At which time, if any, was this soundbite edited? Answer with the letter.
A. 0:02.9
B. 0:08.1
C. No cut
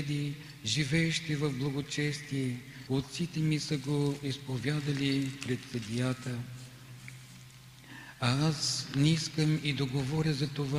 A